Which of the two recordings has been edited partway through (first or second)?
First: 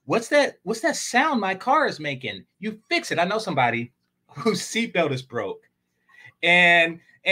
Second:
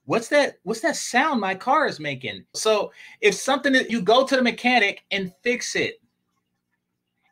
second